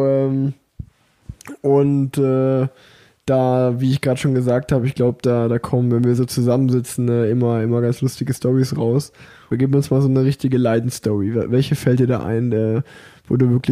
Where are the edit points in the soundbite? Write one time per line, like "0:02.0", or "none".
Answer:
0:09.5